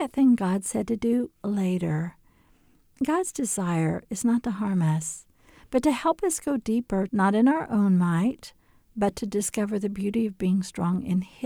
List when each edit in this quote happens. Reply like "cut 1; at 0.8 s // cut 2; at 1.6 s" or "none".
cut 1; at 7.1 s